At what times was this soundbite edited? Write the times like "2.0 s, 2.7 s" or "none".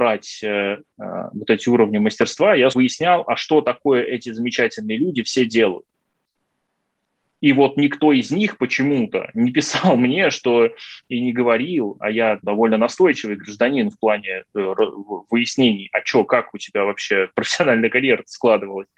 2.7 s, 12.4 s